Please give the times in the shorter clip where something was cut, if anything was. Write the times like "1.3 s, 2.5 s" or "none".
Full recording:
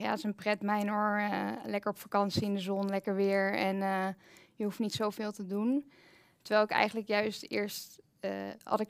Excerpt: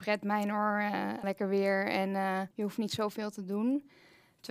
1.2 s, 2.5 s